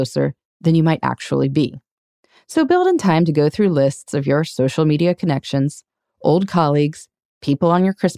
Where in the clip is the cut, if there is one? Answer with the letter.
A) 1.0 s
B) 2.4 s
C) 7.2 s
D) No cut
D